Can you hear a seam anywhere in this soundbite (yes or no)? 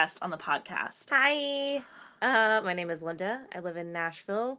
yes